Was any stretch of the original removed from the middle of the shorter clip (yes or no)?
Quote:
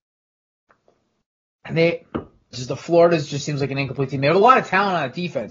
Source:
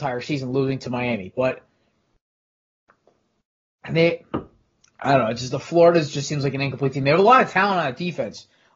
yes